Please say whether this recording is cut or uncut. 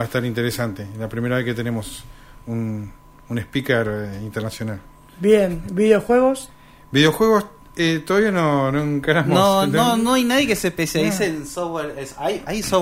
uncut